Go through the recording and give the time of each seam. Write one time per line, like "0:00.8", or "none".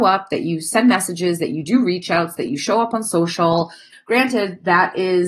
0:03.9